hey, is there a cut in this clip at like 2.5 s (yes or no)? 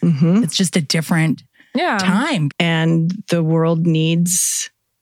yes